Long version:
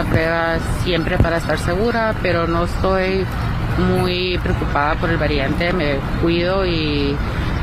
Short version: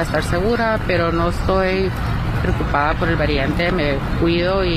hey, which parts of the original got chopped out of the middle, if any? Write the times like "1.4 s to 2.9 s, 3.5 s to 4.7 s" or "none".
3.8 s to 4.4 s

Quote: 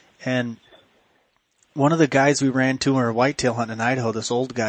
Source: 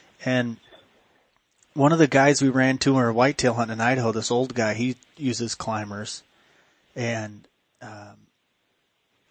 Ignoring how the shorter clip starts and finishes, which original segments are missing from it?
none

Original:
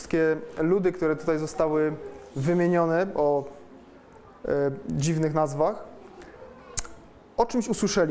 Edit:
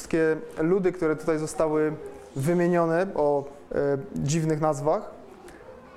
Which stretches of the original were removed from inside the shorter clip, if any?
3.7 s to 4.4 s

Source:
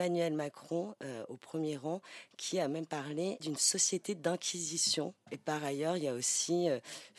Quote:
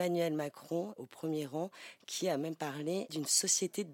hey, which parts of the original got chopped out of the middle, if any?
1.0 s to 1.3 s

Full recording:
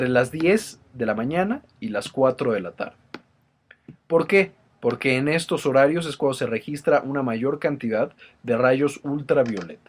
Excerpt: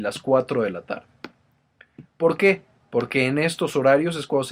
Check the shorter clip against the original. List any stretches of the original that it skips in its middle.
none

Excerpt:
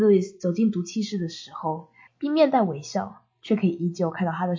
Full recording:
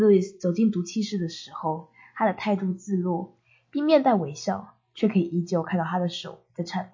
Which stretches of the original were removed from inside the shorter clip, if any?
2.1 s to 3.6 s

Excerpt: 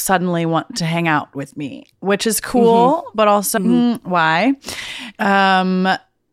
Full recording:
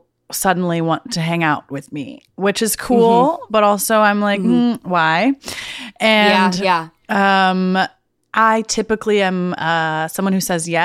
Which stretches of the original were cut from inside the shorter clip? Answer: 3.9 s to 4.4 s, 5.9 s to 7.0 s

